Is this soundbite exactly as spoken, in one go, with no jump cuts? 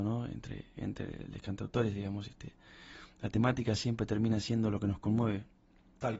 yes; 0 cuts

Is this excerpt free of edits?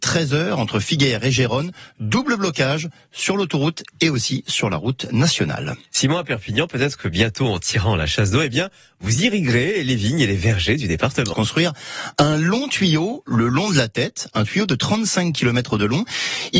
no; 1 cut; at 11.3 s

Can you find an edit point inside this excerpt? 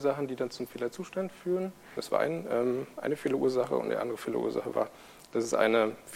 yes; 1 cut; at 2.0 s

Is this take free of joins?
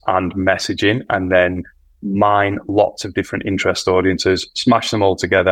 yes; 0 cuts

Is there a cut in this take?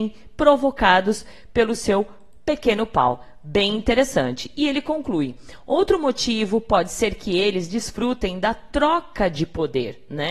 no; 0 cuts

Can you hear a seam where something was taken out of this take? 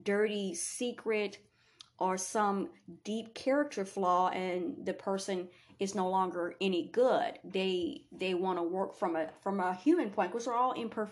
no; 0 cuts

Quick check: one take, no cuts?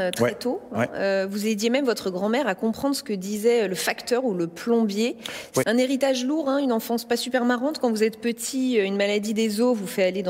no; 1 cut; at 5.6 s

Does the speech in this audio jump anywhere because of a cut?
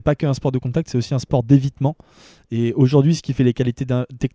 no; 0 cuts

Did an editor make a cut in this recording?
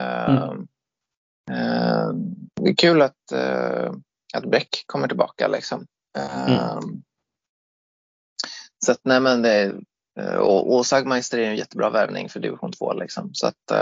yes; 1 cut; at 2.5 s

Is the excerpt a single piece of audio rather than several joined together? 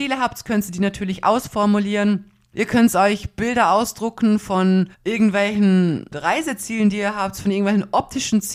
no; 3 cuts; at 2.5 s, 4.9 s, 6.1 s

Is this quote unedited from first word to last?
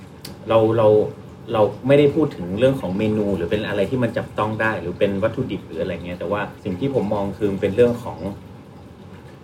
no; 1 cut; at 6.6 s

